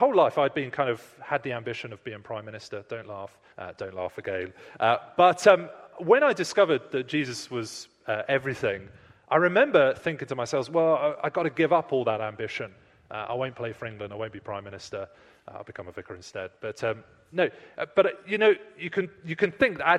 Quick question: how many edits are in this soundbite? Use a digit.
1